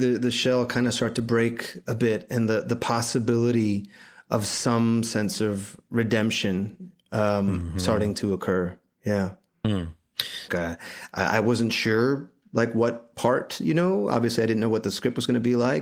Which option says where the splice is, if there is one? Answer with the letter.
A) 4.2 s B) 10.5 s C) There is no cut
B